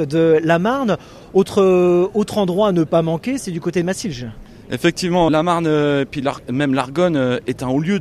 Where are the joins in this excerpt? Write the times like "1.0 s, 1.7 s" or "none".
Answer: 5.3 s